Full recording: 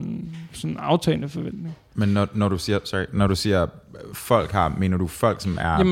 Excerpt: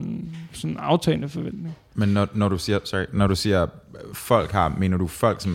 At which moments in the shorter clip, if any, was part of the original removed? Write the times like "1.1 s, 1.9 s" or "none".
none